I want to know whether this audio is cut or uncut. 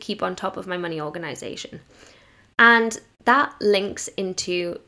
uncut